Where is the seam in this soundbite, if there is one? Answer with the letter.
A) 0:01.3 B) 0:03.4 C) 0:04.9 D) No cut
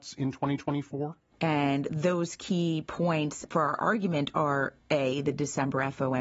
A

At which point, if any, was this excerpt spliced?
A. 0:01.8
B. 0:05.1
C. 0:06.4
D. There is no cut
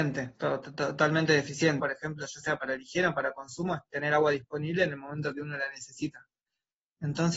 A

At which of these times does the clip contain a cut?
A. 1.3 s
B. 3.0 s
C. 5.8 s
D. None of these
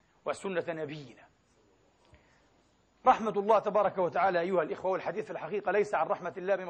D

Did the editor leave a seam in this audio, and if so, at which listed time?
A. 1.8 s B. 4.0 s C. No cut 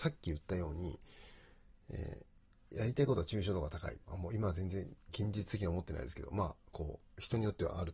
B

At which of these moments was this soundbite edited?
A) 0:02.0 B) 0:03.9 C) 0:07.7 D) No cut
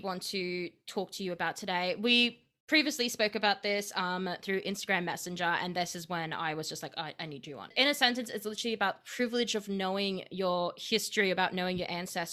C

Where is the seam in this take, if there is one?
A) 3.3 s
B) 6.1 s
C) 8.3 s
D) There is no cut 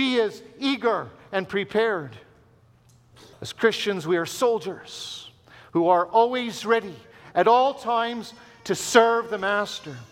A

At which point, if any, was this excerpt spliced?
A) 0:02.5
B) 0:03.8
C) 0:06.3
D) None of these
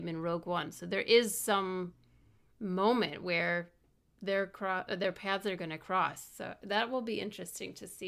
D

